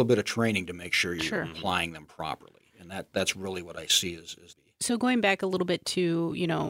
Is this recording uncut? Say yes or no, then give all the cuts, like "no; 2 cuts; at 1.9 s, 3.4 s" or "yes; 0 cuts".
yes; 0 cuts